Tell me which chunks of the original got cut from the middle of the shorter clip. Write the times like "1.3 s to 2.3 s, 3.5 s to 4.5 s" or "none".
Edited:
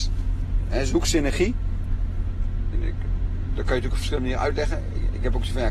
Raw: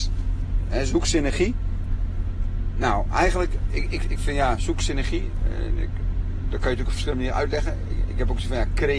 2.7 s to 5.7 s